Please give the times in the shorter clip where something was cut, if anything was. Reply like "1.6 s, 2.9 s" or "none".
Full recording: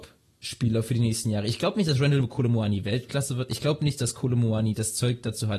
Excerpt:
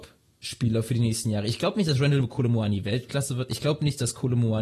none